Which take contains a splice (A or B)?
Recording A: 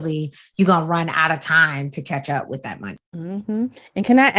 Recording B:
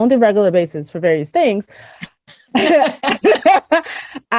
A